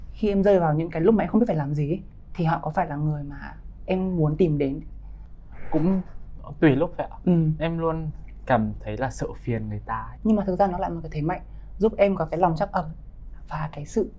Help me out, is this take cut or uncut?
cut